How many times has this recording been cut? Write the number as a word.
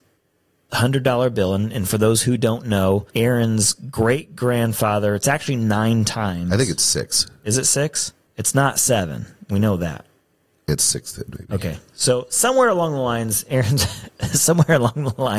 two